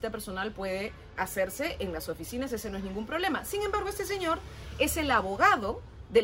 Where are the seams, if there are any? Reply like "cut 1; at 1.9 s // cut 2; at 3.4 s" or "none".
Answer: cut 1; at 1.2 s